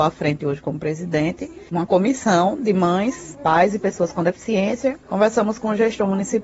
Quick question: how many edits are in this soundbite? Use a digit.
0